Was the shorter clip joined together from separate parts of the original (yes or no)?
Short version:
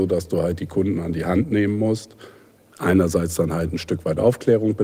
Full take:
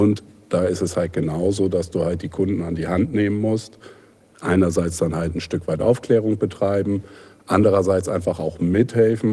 no